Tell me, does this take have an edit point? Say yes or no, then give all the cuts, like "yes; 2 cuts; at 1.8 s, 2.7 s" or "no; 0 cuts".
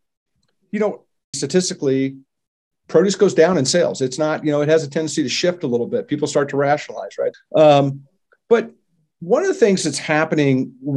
yes; 2 cuts; at 1.3 s, 7.3 s